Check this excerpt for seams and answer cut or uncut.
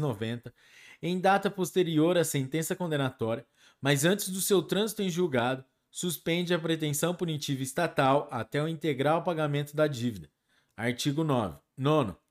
uncut